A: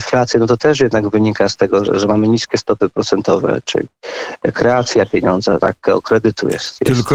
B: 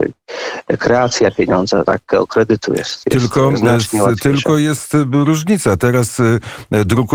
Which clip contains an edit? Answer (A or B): A